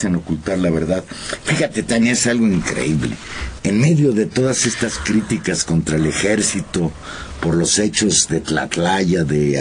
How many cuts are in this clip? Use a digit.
1